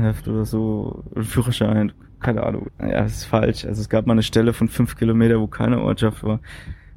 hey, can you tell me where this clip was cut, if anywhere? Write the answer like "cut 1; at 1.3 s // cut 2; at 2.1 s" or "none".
cut 1; at 2.7 s

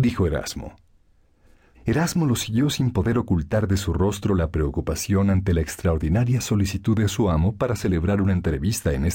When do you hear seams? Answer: cut 1; at 1.7 s

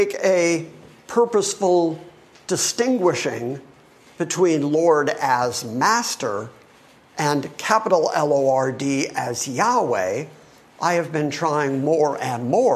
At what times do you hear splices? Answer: none

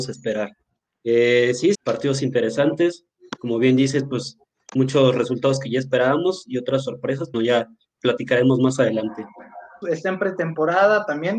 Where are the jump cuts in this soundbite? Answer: cut 1; at 1.7 s // cut 2; at 7.3 s // cut 3; at 9.8 s

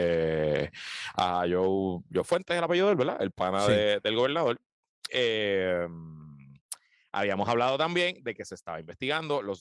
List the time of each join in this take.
cut 1; at 5.1 s

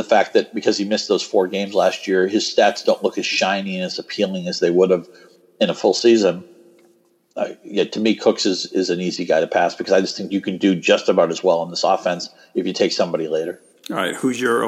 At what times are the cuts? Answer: none

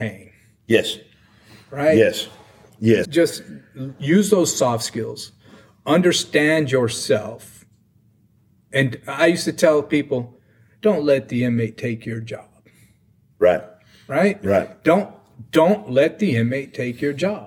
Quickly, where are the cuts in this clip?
cut 1; at 3.0 s

